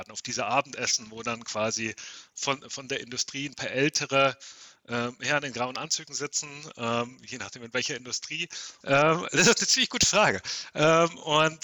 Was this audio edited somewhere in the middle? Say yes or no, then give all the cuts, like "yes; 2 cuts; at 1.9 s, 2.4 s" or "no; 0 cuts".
yes; 1 cut; at 8.8 s